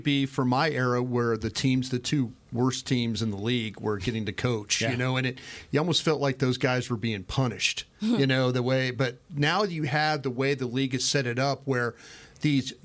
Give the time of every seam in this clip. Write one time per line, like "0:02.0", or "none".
none